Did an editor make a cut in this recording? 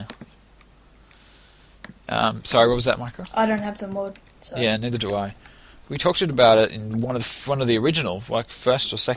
no; 0 cuts

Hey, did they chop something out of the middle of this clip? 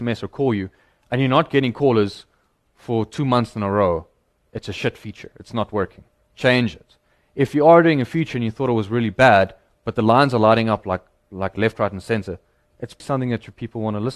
yes; 1 cut; at 13.0 s

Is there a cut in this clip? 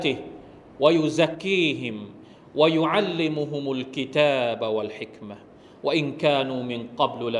yes; 1 cut; at 1.3 s

